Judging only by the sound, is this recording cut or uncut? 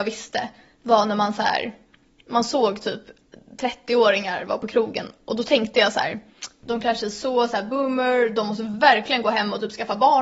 uncut